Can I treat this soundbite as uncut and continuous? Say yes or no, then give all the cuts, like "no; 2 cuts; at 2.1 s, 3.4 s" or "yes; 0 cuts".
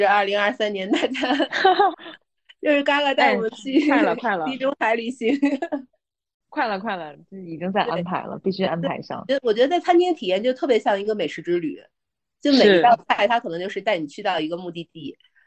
no; 1 cut; at 1.9 s